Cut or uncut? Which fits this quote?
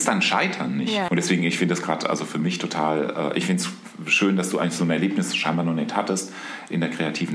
cut